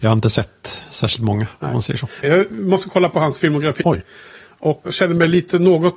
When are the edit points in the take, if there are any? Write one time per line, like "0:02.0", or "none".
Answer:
0:02.2
0:03.8
0:04.8